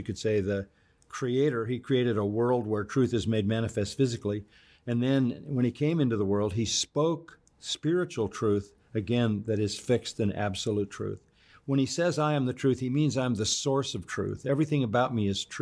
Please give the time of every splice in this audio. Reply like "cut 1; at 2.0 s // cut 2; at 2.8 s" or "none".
none